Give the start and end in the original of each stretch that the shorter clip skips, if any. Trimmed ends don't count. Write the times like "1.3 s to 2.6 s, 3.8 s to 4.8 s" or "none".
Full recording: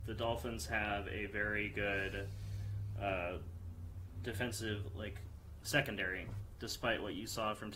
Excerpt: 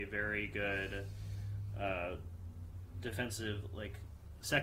none